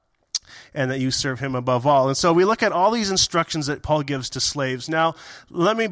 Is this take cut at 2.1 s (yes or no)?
no